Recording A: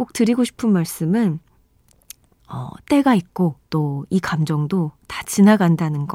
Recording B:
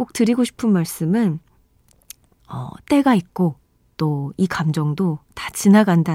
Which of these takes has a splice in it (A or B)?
A